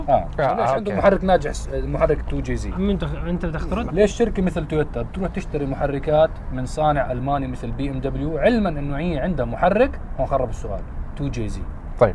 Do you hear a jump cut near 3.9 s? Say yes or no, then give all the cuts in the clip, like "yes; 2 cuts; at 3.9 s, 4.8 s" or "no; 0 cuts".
yes; 2 cuts; at 2.7 s, 3.9 s